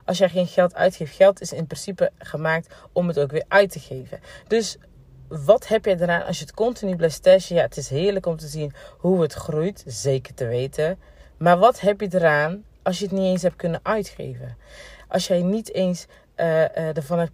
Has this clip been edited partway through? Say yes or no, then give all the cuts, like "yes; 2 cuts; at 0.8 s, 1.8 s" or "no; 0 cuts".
no; 0 cuts